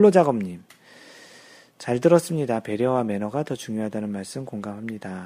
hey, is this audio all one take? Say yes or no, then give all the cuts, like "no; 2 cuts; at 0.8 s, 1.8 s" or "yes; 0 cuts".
yes; 0 cuts